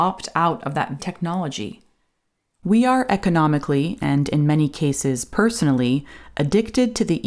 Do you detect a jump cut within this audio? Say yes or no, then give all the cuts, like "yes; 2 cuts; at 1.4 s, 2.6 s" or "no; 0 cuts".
yes; 1 cut; at 1.0 s